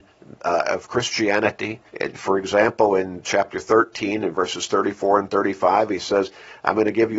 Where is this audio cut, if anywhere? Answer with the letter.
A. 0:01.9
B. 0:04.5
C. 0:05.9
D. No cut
A